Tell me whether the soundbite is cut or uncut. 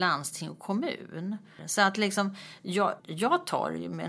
cut